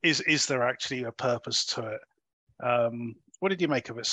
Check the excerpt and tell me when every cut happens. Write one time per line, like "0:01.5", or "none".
none